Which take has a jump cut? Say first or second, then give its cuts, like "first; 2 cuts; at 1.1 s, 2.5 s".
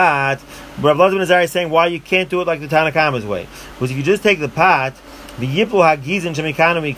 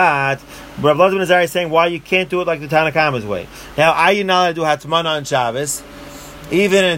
second; 1 cut; at 3.7 s